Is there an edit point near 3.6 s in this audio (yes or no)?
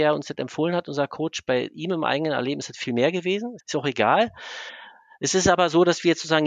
yes